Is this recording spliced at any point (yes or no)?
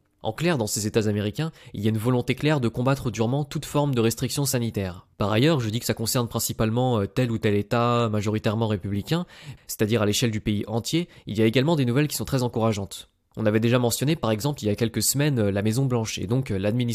yes